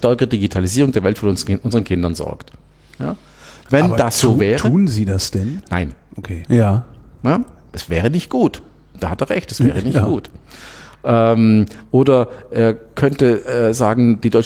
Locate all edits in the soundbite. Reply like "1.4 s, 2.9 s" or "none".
6.5 s